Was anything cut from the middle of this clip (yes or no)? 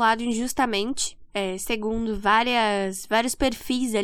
no